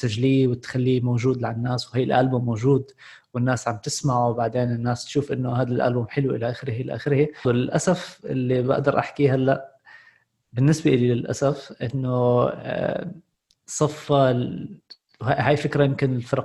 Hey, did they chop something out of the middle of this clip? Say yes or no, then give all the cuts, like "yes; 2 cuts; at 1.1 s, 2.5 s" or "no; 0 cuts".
no; 0 cuts